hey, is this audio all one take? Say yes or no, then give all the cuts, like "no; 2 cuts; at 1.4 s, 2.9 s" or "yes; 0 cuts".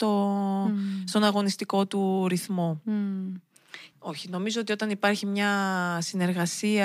no; 1 cut; at 3.9 s